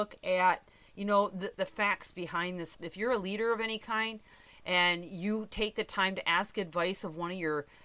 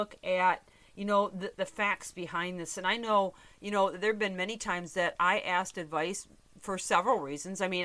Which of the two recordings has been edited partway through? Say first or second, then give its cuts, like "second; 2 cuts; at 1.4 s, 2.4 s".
first; 1 cut; at 2.7 s